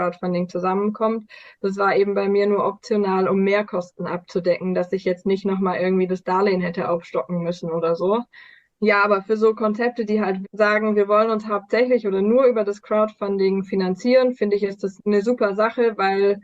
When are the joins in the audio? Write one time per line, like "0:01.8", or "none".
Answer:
0:10.4
0:15.0